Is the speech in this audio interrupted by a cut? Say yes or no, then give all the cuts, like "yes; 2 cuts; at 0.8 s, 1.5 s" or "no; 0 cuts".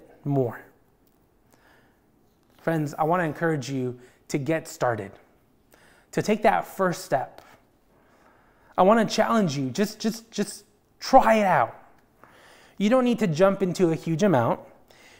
no; 0 cuts